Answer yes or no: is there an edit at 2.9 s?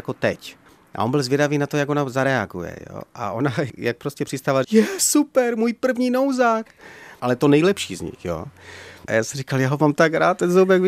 no